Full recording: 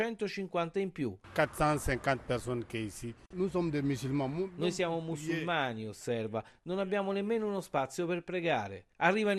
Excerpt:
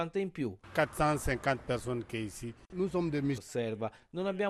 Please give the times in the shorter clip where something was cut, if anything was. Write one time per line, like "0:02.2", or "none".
0:03.4